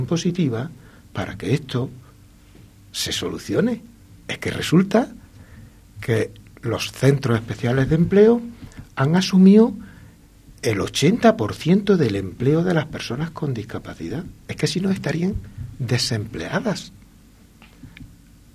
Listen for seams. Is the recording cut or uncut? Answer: uncut